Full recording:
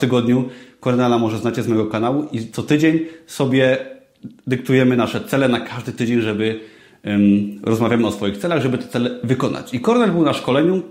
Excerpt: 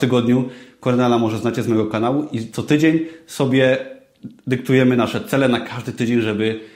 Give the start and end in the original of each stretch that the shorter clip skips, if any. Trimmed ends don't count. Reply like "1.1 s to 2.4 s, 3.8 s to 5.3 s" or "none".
none

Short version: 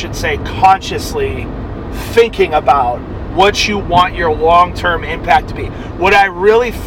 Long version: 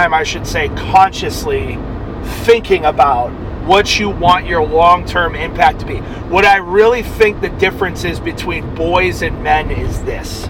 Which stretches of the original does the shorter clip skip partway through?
none

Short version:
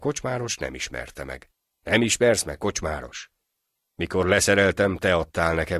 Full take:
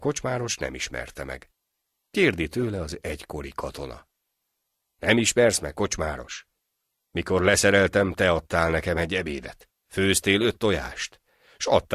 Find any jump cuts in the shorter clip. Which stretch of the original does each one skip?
1.7 s to 4.9 s

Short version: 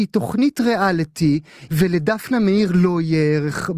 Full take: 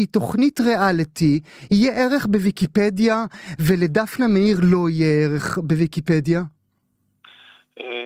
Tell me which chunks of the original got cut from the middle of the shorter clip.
1.7 s to 3.6 s

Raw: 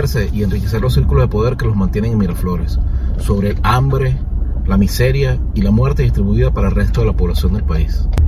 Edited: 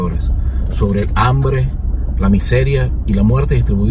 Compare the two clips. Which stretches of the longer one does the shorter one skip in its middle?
none

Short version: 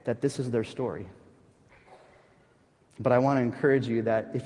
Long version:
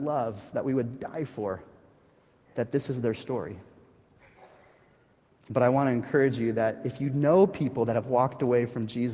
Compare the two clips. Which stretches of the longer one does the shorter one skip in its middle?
none

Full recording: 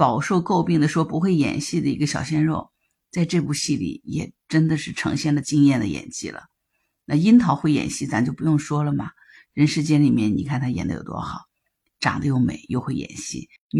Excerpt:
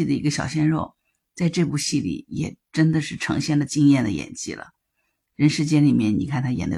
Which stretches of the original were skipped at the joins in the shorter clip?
7.0 s to 9.5 s

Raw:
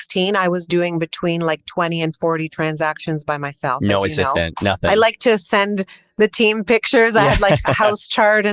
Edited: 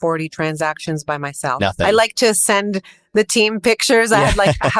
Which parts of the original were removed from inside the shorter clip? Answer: 3.8 s to 4.6 s

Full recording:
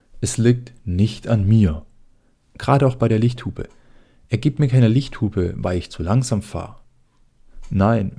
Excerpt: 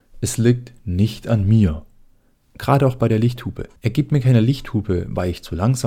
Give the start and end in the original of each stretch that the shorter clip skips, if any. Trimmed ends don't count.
3.8 s to 4.2 s

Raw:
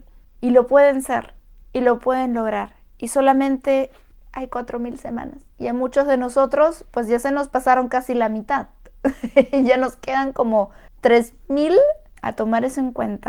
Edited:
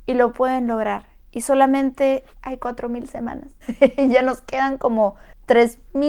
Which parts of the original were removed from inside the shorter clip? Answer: 4.0 s to 4.2 s, 5.5 s to 9.2 s

